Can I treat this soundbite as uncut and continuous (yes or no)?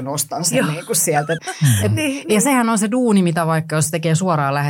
no